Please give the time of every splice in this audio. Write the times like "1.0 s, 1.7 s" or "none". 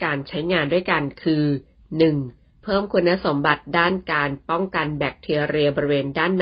2.6 s